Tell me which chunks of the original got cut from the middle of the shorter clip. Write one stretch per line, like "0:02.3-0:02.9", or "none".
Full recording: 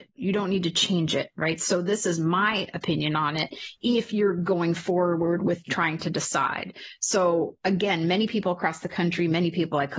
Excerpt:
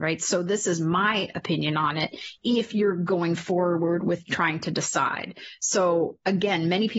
none